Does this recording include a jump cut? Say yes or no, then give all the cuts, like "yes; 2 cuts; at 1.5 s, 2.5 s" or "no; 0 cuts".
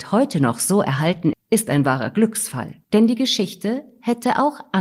yes; 2 cuts; at 1.3 s, 2.8 s